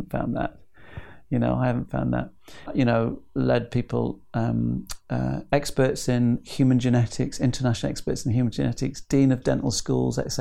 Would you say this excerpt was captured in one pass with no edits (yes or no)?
no